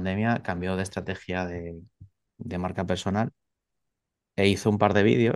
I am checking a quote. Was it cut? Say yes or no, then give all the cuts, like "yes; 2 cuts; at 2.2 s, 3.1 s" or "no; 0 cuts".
no; 0 cuts